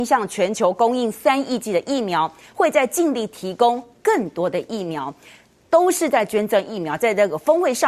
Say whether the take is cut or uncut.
uncut